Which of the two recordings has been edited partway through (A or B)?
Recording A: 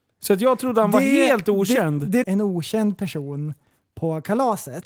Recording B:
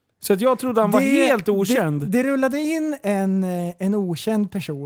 A